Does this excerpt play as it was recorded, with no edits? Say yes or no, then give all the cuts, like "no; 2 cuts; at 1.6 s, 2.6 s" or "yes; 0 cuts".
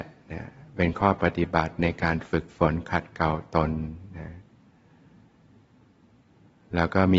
yes; 0 cuts